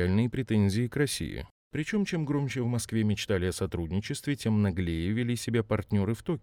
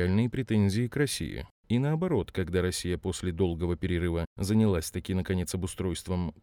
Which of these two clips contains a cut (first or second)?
second